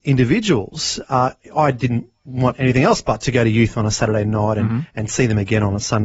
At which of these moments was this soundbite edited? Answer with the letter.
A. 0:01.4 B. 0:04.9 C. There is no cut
C